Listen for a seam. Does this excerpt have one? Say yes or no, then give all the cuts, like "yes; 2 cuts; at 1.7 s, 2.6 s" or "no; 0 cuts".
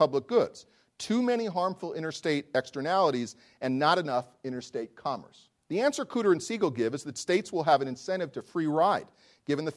yes; 1 cut; at 5.6 s